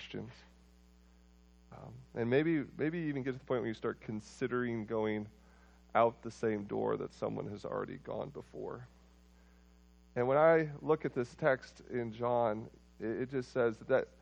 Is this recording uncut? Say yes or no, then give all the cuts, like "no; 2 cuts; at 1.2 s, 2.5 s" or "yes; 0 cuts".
yes; 0 cuts